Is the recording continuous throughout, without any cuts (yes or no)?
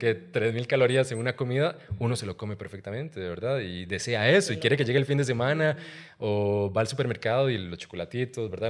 yes